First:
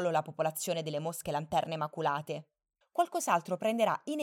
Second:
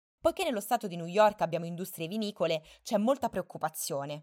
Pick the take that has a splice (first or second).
first